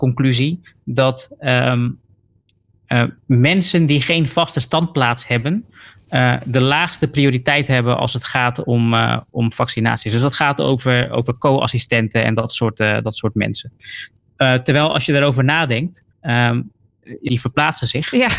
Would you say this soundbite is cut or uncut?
cut